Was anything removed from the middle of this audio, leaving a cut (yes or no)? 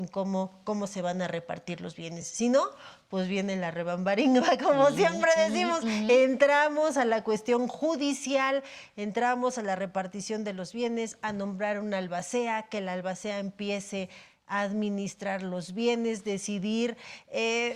no